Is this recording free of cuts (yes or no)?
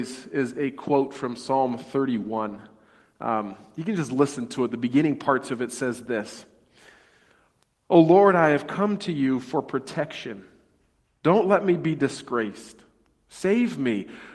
yes